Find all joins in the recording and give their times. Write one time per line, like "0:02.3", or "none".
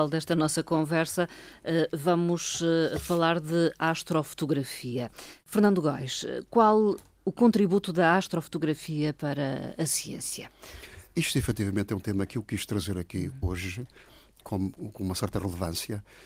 0:14.8